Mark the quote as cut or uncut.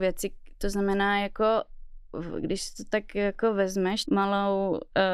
cut